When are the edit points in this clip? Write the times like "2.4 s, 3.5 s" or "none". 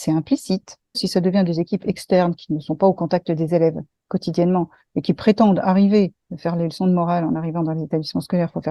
0.9 s, 6.2 s